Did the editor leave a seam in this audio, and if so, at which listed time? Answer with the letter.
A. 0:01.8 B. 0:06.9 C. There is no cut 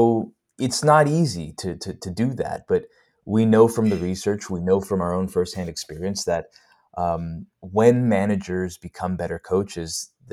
C